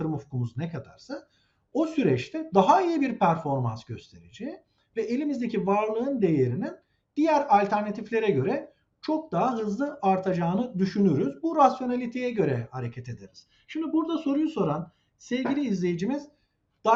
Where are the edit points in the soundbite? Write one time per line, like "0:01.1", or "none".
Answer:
none